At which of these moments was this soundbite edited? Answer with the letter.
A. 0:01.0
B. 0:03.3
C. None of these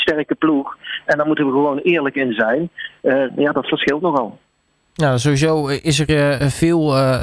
B